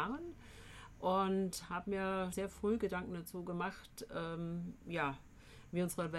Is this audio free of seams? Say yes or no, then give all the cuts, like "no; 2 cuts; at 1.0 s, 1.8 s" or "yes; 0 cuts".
no; 1 cut; at 2.3 s